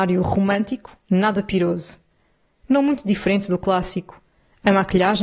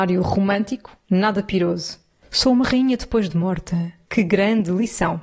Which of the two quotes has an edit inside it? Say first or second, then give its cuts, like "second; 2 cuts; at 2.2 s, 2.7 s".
second; 2 cuts; at 2.2 s, 4.0 s